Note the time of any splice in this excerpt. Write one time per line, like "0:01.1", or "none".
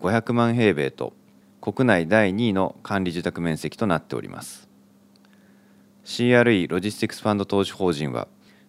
none